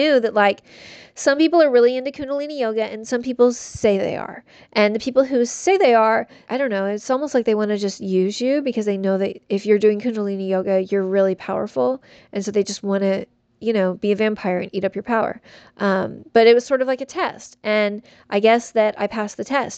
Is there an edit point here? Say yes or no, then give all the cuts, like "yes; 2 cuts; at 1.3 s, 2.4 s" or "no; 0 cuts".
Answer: yes; 1 cut; at 6.5 s